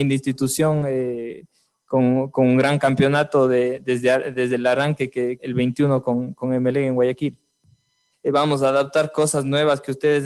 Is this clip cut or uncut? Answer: cut